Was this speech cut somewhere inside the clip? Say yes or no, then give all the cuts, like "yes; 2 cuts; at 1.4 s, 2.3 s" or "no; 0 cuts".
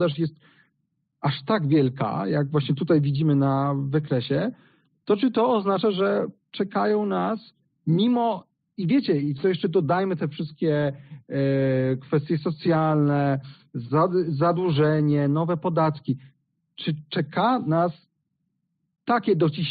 no; 0 cuts